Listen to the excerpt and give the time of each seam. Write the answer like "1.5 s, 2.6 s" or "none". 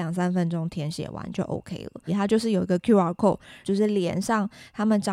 2.1 s, 3.6 s